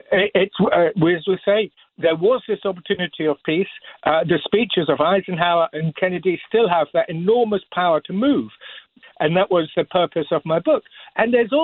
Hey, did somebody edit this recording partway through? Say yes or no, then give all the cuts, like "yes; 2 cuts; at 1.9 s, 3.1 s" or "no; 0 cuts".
yes; 1 cut; at 9.0 s